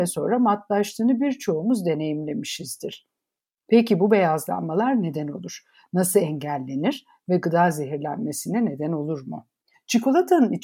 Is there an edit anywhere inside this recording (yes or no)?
yes